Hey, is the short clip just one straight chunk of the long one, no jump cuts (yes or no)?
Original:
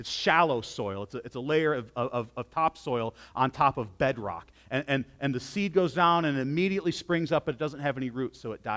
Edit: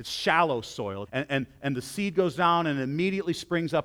no